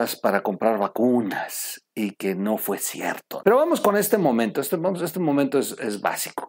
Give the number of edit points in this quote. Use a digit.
1